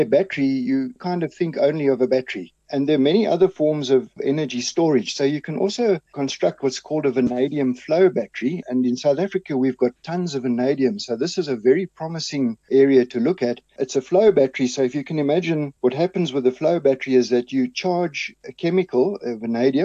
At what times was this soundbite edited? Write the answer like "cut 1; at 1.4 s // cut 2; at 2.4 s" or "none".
none